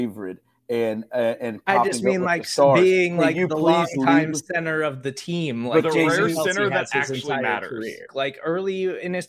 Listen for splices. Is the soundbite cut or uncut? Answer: cut